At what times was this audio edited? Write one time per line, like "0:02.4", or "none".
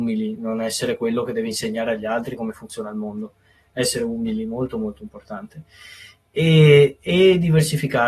none